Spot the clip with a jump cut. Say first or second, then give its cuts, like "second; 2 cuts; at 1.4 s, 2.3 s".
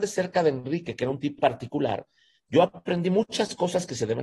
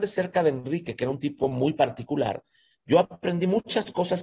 first; 1 cut; at 1.4 s